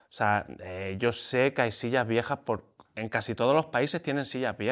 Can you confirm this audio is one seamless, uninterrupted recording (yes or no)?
yes